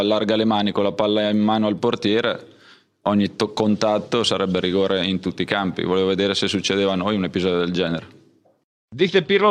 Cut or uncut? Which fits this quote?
uncut